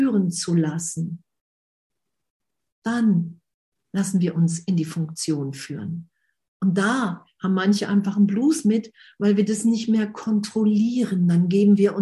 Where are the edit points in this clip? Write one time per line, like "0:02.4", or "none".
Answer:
none